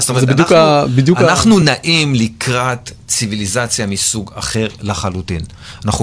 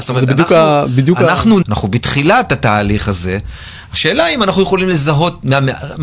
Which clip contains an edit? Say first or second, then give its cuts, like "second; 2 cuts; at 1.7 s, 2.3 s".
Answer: second; 1 cut; at 1.6 s